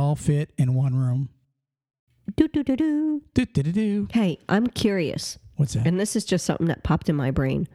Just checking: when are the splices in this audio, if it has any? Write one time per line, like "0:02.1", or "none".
none